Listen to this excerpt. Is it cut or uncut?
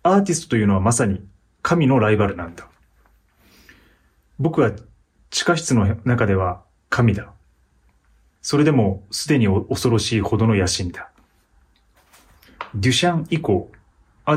cut